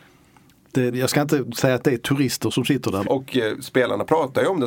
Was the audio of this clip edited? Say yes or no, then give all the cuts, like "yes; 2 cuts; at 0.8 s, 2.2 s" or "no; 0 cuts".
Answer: yes; 2 cuts; at 0.9 s, 3.0 s